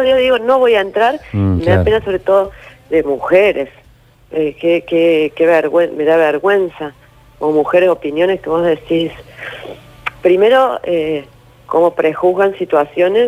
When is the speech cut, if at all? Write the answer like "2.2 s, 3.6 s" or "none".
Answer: 1.6 s, 4.1 s